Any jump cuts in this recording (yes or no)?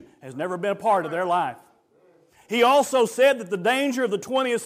no